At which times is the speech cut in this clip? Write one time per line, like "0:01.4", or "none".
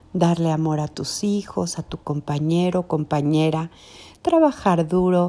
0:04.2